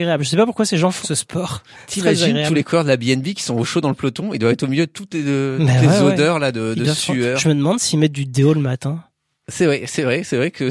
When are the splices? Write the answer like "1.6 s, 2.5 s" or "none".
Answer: 1.0 s